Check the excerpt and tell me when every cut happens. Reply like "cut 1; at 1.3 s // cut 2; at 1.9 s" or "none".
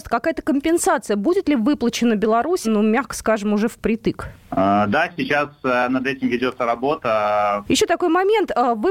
cut 1; at 2.6 s // cut 2; at 7.6 s